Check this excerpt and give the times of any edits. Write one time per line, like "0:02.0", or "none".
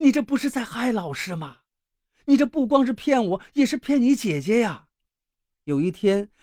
0:05.5